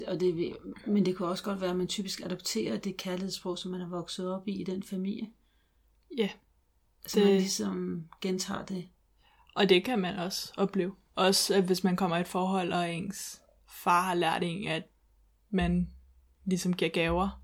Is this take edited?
no; 0 cuts

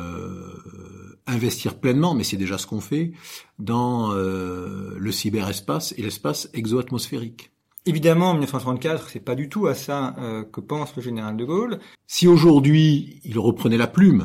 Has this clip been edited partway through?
yes; 2 cuts; at 7.8 s, 11.9 s

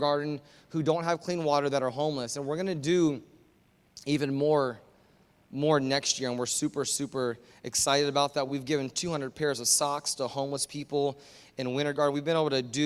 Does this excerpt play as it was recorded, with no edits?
yes; 0 cuts

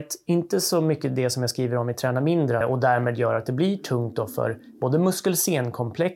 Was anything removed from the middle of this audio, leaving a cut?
yes; 1 cut; at 2.6 s

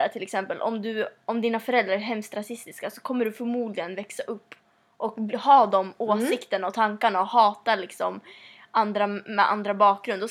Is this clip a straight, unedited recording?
yes; 0 cuts

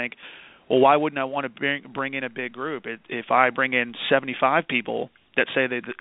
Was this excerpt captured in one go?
yes; 0 cuts

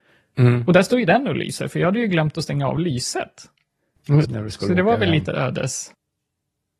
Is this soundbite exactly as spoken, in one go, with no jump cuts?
no; 1 cut; at 4.2 s

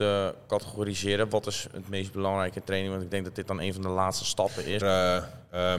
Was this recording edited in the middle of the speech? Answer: yes; 1 cut; at 4.8 s

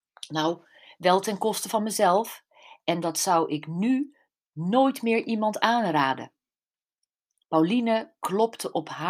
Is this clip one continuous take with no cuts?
yes; 0 cuts

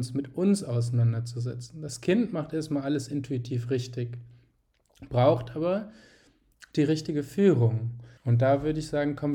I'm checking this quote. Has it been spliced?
yes; 1 cut; at 8.2 s

